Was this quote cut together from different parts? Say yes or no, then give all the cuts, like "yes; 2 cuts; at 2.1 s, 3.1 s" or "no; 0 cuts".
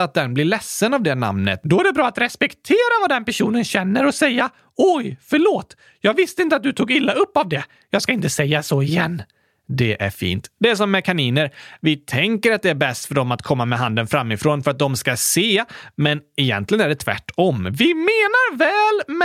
no; 0 cuts